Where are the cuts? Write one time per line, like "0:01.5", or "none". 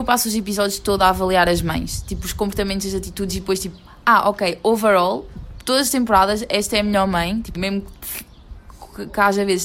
0:07.5